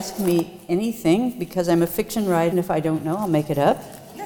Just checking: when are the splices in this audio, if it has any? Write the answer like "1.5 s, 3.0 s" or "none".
2.5 s